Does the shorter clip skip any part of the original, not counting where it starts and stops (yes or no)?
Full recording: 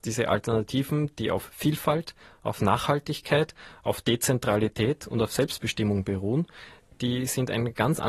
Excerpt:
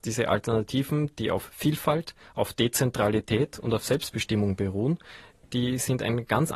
yes